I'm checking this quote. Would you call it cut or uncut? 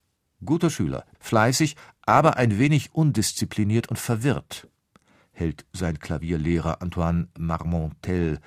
cut